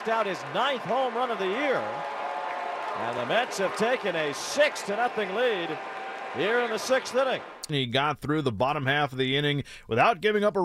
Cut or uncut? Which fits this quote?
cut